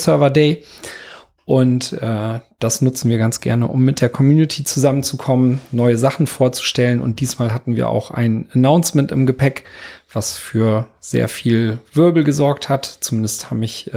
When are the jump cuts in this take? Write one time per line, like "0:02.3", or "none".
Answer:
none